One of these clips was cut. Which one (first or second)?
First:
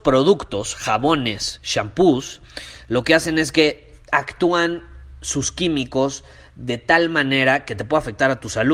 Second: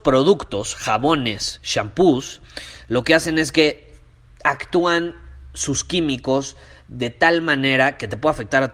first